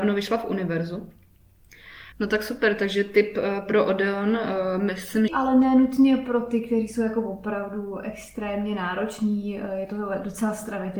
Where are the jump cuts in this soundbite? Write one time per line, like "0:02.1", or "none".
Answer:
0:02.1
0:05.3